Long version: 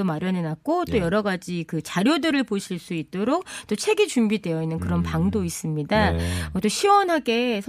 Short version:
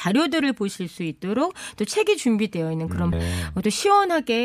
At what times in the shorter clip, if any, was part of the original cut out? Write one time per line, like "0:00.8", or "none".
0:03.1